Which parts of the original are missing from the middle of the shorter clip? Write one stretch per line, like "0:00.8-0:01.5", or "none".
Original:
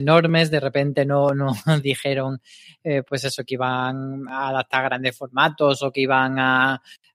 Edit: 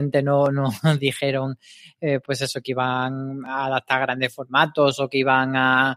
none

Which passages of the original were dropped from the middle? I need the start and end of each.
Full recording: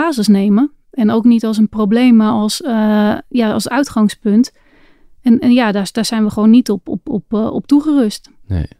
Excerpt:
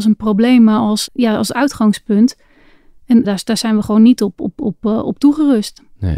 0:02.6-0:03.2
0:05.4-0:05.7

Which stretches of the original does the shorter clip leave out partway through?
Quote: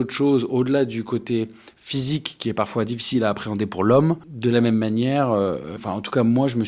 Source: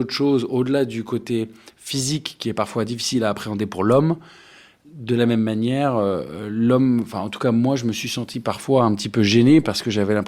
0:04.2-0:04.9
0:06.4-0:07.0

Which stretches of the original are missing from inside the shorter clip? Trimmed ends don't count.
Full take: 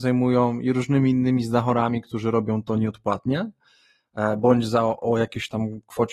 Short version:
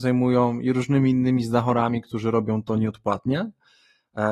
none

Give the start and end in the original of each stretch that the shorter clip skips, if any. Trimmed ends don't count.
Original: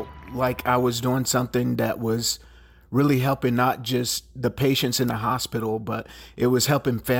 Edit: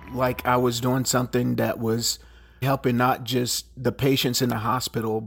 0:02.8-0:03.2

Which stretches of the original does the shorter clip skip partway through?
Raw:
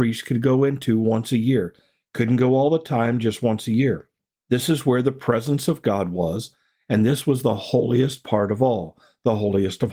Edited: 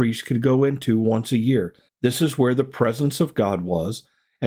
0:01.9-0:04.4

